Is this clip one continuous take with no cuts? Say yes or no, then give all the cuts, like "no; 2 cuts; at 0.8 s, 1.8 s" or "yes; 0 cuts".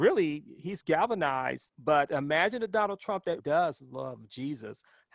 no; 2 cuts; at 1.7 s, 3.4 s